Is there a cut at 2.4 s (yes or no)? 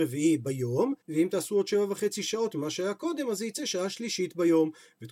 no